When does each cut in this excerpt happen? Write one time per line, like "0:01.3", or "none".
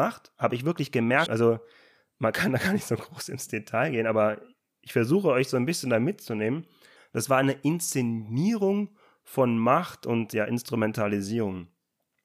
0:01.3
0:07.0